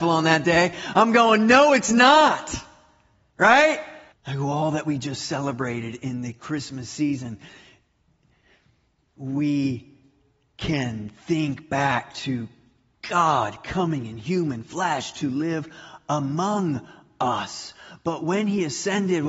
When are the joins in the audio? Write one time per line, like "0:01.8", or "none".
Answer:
0:04.1
0:09.1

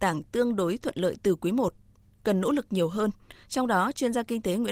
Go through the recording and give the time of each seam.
none

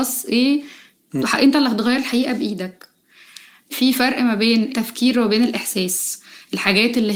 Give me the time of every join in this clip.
0:01.2

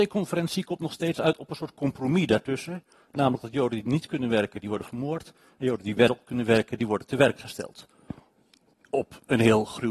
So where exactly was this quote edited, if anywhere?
none

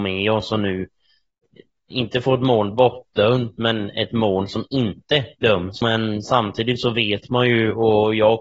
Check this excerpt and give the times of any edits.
0:05.8

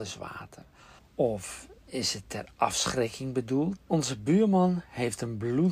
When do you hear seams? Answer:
0:01.0
0:03.8

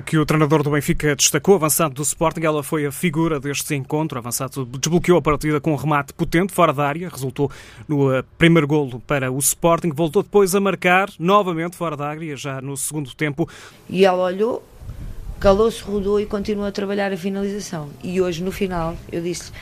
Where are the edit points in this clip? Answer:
0:13.7

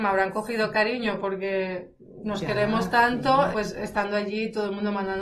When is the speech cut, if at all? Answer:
0:03.5

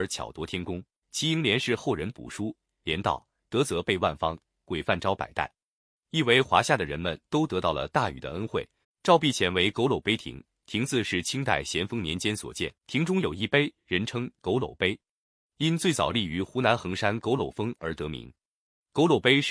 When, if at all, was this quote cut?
0:01.0
0:08.8
0:12.8

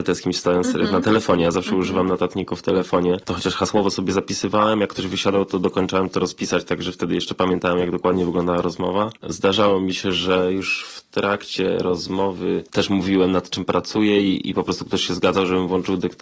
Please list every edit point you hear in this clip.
none

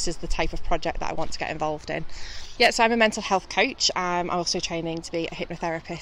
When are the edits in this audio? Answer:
0:02.6

